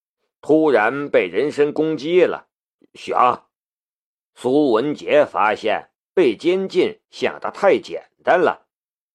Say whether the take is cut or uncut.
cut